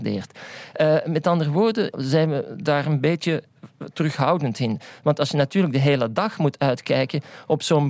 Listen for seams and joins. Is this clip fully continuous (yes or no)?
no